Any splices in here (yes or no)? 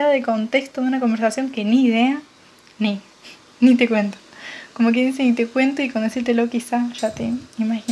no